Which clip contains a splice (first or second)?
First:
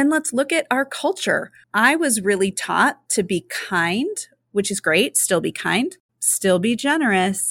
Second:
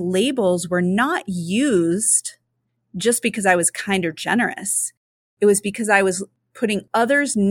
first